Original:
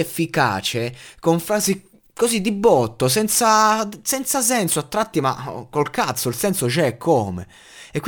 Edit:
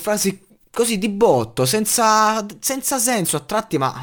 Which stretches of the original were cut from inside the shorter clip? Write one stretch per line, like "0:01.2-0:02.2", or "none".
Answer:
none